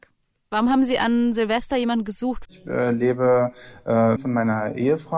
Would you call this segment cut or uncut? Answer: cut